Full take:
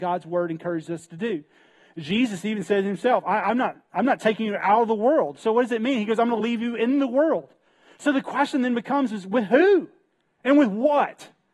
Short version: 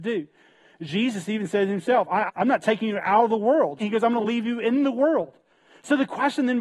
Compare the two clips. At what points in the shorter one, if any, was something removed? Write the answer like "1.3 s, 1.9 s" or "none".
2.3 s, 3.8 s